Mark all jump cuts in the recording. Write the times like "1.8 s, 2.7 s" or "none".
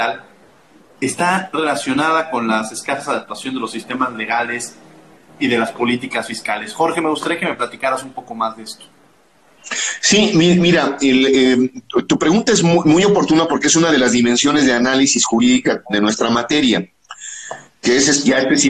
none

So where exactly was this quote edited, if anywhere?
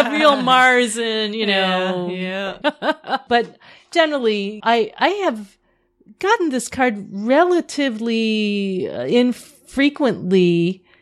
2.6 s, 4.6 s

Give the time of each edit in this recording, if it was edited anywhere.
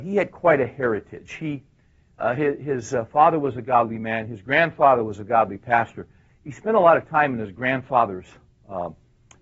none

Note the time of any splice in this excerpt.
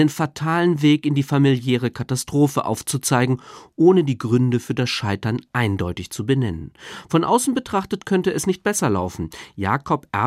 none

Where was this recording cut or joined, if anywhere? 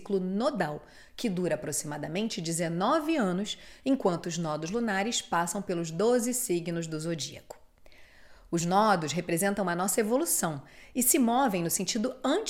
none

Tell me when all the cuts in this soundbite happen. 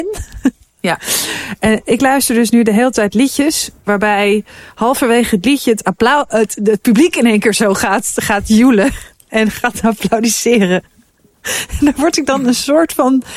none

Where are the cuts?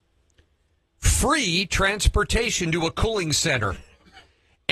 none

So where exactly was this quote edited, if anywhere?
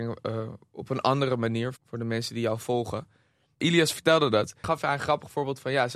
1.7 s

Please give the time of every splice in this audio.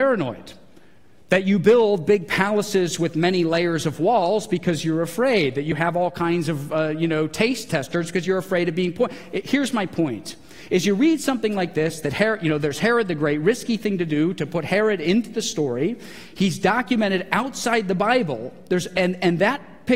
none

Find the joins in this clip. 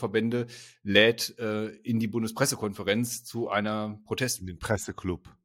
none

